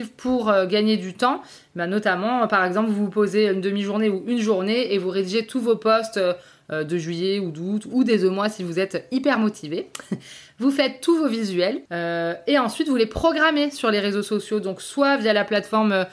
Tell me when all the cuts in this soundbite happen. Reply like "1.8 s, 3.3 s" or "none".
11.9 s